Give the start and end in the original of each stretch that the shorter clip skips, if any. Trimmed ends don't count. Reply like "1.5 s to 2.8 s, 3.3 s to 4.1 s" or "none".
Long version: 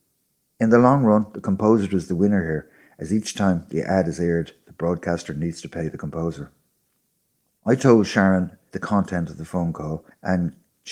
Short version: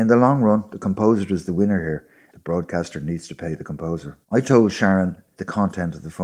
2.9 s to 4.6 s, 6.6 s to 7.6 s